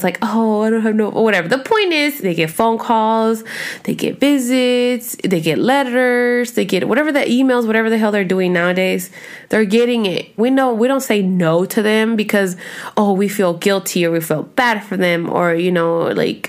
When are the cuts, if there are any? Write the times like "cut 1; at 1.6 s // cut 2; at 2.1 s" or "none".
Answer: cut 1; at 2.2 s // cut 2; at 10.4 s